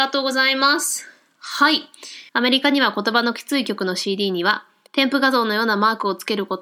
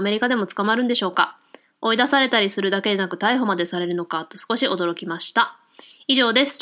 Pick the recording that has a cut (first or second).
first